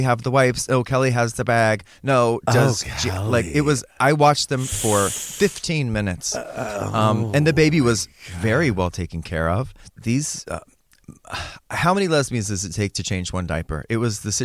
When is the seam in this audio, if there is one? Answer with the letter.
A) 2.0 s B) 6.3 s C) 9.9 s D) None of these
C